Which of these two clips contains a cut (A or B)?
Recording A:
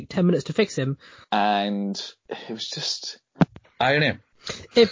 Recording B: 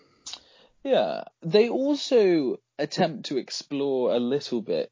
A